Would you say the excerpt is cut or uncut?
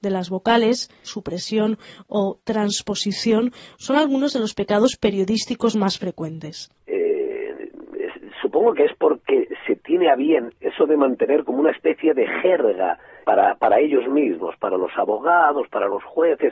cut